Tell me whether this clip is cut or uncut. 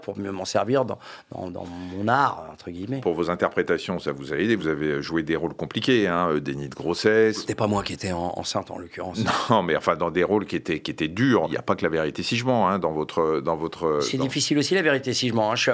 uncut